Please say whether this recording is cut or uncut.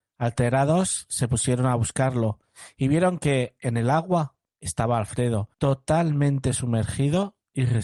cut